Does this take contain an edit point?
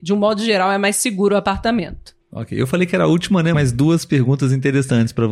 yes; 2 cuts; at 2.2 s, 3.5 s

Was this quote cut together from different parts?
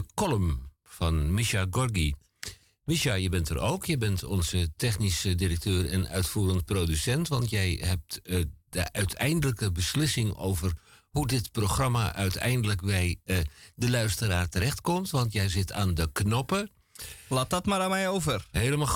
no; 0 cuts

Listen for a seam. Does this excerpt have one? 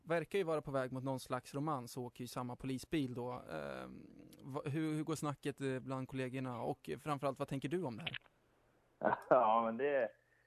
no; 0 cuts

